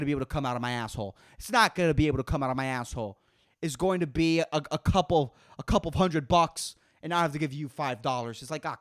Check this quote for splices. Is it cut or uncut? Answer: uncut